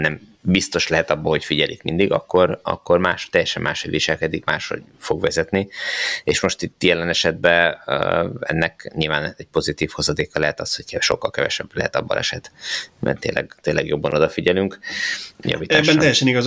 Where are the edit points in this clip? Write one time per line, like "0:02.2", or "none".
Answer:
0:15.4

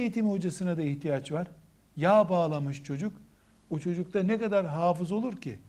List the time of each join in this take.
none

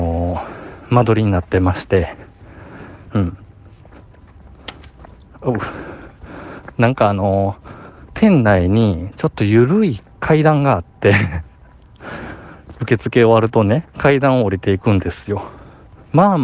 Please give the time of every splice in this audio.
none

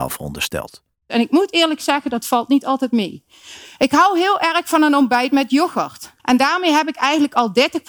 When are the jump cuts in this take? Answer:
0:06.2

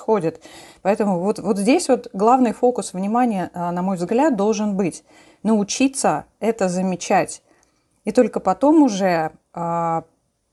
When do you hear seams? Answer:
none

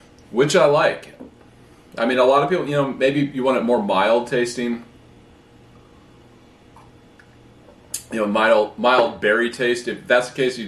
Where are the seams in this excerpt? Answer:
none

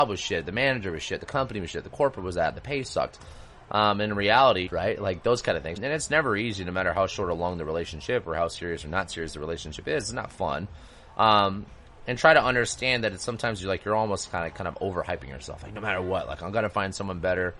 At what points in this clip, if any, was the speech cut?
0:04.7
0:05.8

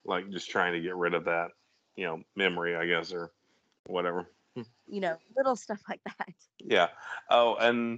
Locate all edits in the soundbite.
0:04.9

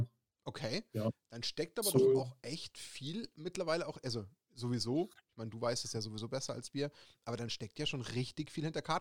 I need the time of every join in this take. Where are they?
none

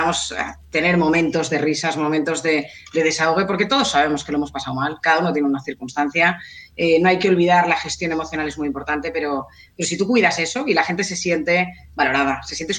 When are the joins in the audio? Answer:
none

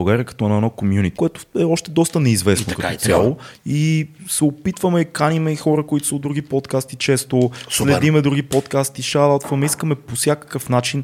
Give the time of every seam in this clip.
0:01.1
0:03.5

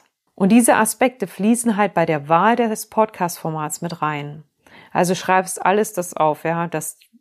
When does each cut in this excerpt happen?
none

